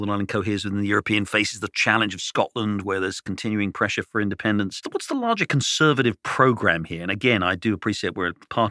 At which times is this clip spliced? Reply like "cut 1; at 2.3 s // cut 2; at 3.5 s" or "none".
none